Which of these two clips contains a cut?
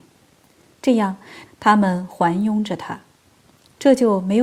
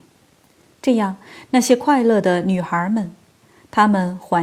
first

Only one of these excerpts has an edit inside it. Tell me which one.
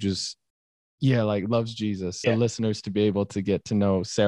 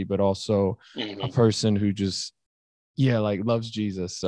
first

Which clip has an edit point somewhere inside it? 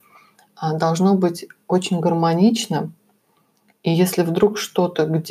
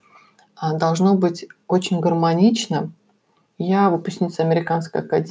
second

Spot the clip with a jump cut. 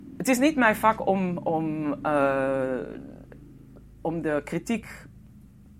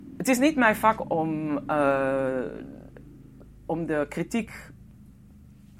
second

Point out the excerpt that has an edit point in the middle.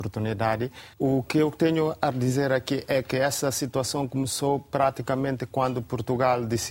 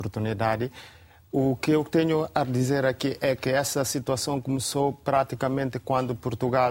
first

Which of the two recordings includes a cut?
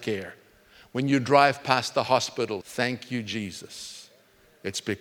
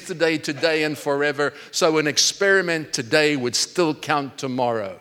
first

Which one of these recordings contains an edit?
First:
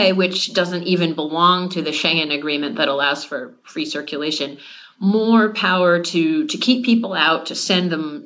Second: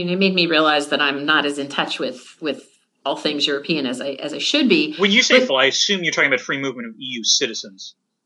second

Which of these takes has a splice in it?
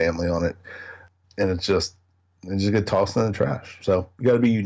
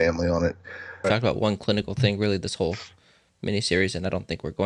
second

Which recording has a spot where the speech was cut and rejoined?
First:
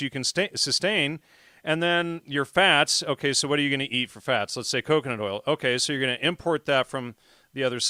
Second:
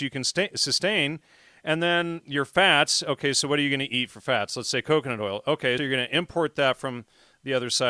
second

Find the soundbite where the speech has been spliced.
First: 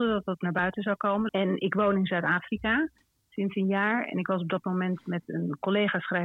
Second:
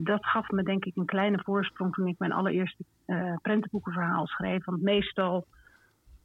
first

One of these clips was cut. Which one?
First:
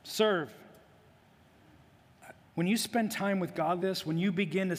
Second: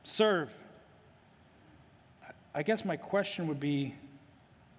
first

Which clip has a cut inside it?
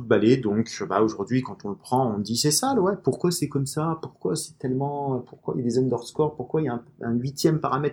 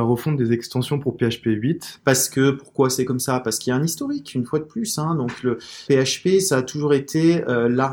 second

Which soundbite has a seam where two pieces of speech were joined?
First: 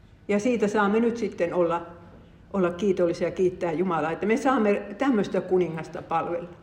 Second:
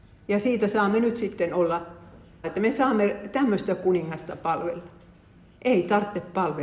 second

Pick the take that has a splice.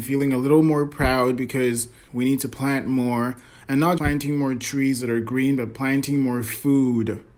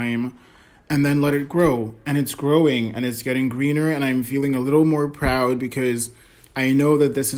first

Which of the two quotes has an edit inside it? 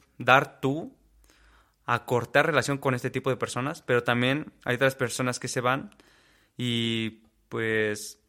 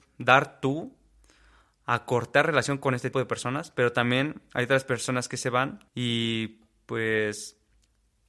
second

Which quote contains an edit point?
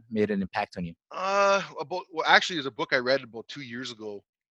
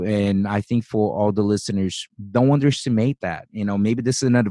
first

